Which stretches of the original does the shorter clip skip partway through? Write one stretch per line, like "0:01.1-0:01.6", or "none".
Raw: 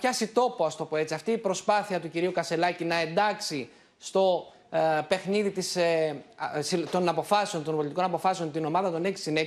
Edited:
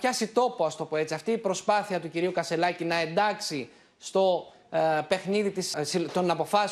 0:05.7-0:06.5